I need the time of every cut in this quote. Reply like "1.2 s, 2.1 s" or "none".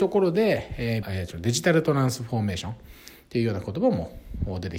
1.0 s